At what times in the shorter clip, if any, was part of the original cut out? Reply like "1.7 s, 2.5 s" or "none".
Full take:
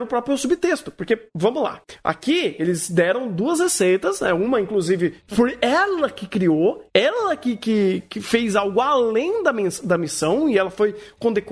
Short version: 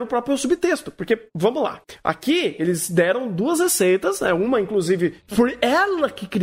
none